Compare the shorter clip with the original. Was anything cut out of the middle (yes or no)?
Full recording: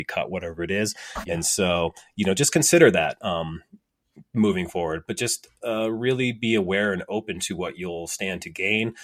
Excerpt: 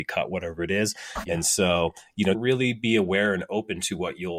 yes